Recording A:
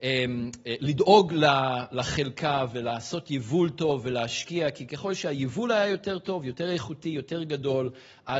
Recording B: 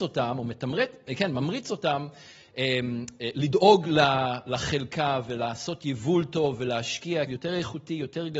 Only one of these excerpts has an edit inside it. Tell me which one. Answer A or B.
B